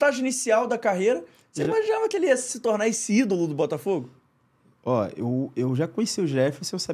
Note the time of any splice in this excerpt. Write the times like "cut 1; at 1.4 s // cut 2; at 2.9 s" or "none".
none